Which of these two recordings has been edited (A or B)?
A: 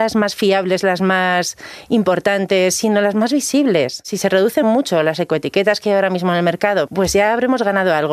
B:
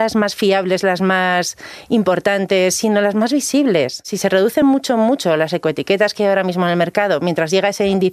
A